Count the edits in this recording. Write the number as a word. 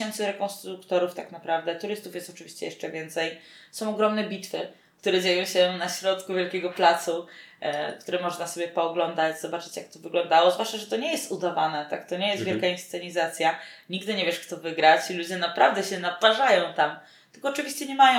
zero